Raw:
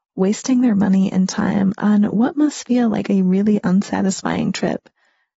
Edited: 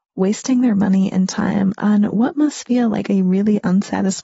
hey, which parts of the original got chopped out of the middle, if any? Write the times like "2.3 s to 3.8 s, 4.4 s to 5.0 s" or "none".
none